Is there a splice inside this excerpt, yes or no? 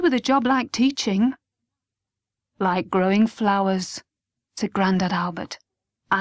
no